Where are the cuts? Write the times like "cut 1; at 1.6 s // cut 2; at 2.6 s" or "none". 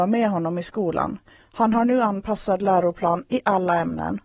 cut 1; at 1.4 s